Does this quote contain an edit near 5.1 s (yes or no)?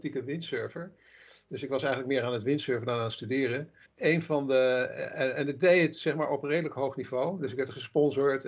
no